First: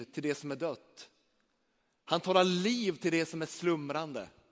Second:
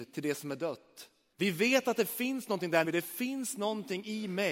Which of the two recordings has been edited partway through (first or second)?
second